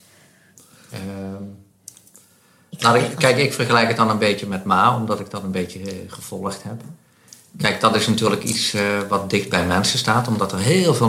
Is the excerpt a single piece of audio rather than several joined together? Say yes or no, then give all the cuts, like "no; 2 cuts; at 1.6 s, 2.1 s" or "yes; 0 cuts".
no; 1 cut; at 0.9 s